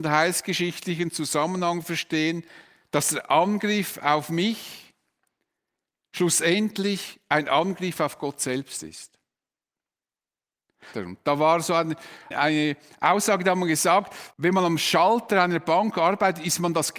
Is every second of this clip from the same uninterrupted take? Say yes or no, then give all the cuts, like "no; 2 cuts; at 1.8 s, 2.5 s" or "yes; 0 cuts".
no; 3 cuts; at 10.9 s, 12.3 s, 14.3 s